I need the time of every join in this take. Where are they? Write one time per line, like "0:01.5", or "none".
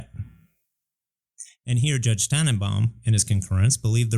none